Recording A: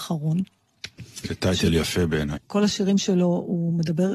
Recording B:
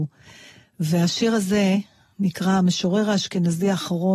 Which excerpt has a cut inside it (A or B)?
A